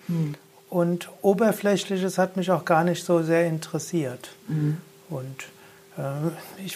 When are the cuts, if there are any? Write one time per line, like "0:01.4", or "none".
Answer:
none